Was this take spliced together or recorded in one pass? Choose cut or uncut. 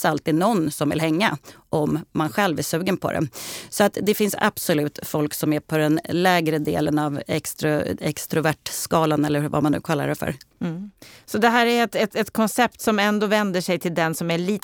uncut